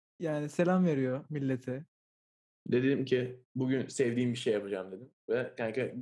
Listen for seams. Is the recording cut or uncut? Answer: cut